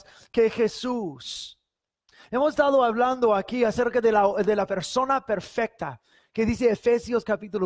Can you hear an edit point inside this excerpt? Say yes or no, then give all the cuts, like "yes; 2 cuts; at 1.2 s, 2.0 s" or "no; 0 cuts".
yes; 1 cut; at 4.4 s